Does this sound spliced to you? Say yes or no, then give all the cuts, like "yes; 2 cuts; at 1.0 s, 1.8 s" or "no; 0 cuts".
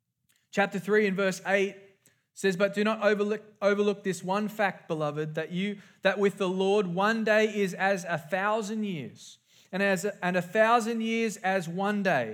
no; 0 cuts